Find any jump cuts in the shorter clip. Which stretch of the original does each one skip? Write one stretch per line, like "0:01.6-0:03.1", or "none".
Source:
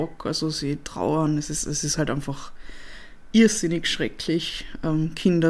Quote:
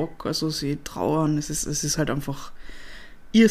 none